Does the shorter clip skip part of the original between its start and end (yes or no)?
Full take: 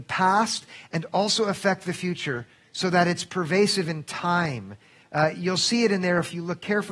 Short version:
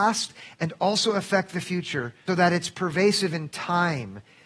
yes